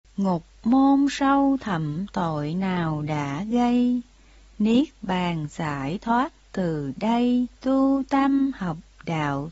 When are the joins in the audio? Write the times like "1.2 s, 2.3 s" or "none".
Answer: 7.6 s